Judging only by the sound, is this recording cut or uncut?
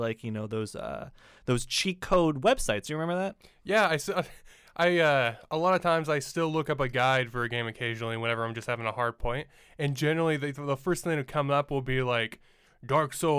uncut